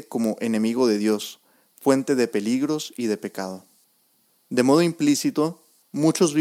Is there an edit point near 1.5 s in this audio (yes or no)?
no